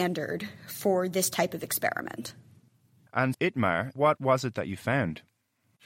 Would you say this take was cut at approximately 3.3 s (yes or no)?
yes